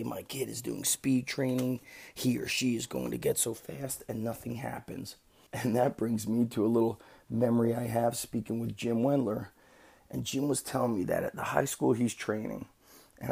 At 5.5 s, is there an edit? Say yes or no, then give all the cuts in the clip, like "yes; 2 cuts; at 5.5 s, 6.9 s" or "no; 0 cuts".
yes; 1 cut; at 5.5 s